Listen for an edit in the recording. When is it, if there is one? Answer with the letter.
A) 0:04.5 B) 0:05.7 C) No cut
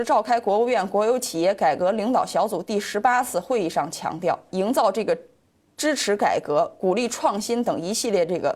A